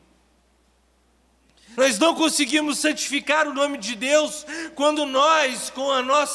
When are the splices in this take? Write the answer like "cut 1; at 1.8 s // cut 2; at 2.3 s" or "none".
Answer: cut 1; at 1.7 s